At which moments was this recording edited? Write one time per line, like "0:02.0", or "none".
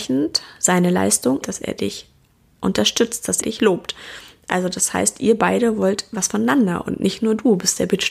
0:01.4
0:03.4